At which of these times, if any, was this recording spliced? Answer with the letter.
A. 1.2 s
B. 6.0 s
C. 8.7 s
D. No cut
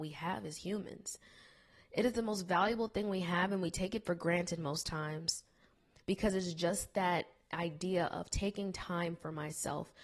B